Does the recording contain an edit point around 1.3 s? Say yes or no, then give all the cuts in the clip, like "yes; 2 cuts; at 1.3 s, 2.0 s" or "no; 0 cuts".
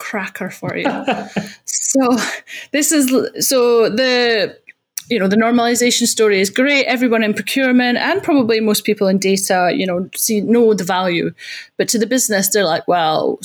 no; 1 cut; at 3.3 s